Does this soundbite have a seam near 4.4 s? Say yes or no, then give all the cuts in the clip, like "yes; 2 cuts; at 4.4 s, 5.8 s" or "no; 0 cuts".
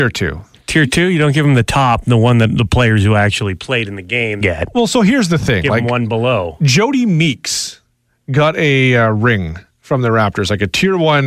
yes; 1 cut; at 4.4 s